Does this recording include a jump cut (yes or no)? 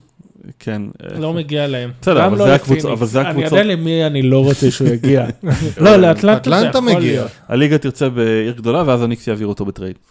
yes